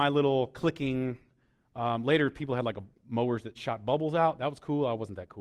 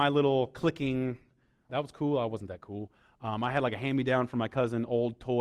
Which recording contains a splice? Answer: second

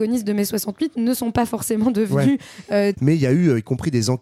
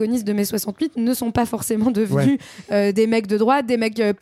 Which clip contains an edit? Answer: first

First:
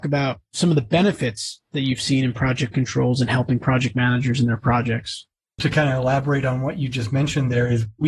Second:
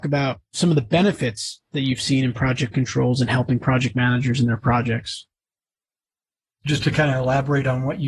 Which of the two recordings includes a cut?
first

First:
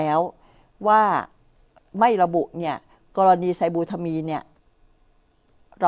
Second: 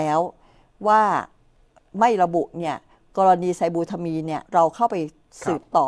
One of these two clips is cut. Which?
second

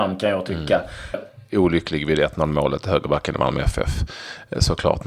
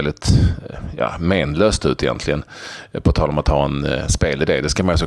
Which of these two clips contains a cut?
first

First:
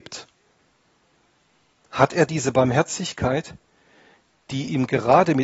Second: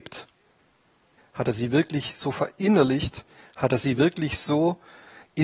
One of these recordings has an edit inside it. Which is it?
second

